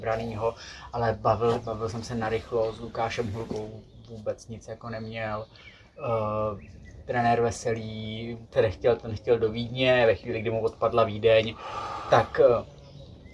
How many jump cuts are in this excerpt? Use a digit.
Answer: 1